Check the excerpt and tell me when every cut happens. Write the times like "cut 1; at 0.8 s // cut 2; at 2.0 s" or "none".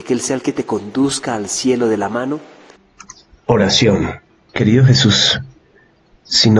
none

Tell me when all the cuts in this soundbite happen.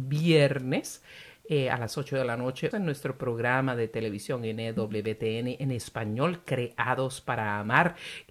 cut 1; at 2.7 s

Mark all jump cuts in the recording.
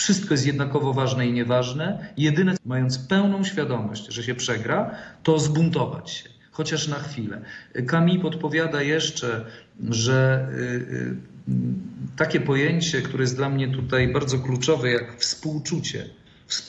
cut 1; at 2.6 s

